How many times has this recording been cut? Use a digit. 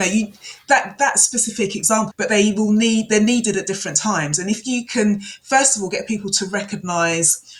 1